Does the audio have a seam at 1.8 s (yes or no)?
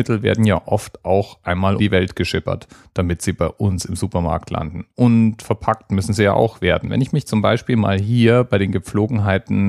yes